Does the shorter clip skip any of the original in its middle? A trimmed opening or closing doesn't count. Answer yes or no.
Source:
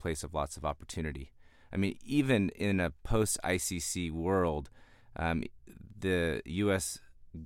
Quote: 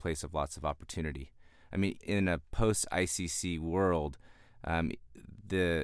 yes